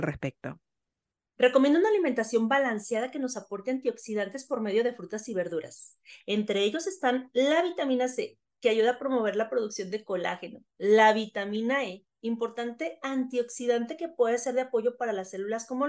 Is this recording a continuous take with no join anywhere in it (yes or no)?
yes